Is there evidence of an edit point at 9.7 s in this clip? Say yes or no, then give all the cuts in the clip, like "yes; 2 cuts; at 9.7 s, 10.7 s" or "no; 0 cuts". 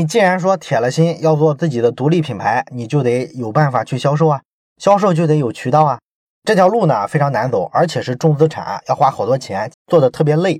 yes; 2 cuts; at 6.3 s, 9.7 s